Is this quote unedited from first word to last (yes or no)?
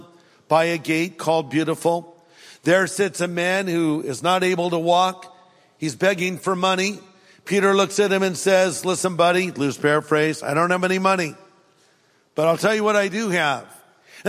yes